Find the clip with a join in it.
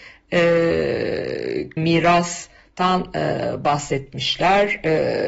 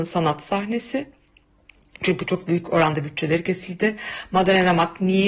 first; 1 cut; at 1.8 s

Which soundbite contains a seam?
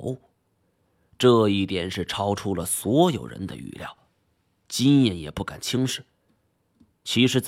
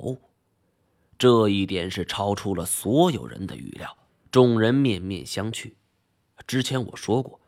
second; 1 cut; at 4.1 s

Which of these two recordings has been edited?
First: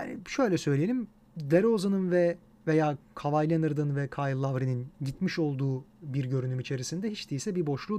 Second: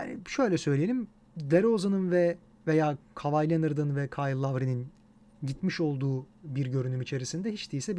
first; 1 cut; at 4.9 s

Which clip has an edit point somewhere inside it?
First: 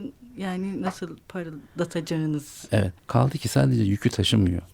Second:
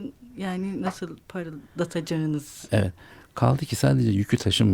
first; 1 cut; at 3.0 s

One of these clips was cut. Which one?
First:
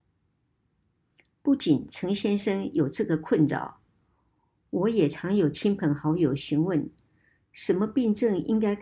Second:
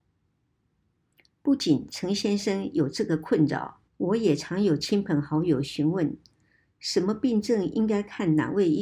second; 1 cut; at 3.9 s

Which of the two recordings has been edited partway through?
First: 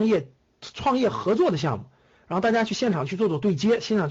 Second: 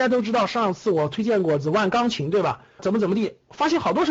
second; 1 cut; at 2.8 s

